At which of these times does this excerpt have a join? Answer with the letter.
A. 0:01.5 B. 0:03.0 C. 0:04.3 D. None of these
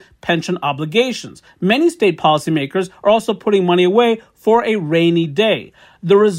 A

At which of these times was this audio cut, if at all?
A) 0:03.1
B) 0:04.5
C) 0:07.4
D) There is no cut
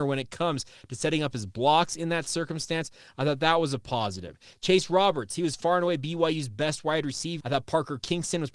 C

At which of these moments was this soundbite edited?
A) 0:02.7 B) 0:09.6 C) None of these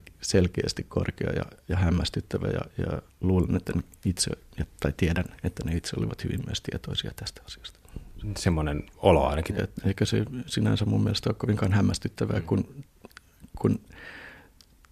B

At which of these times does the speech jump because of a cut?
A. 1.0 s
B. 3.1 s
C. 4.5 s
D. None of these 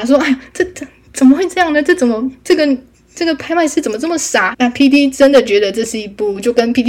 C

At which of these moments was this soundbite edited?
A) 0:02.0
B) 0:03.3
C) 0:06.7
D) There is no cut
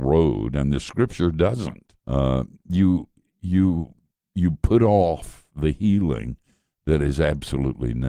A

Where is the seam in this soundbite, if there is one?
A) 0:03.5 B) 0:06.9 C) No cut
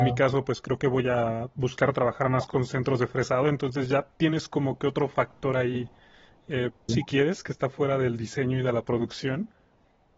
B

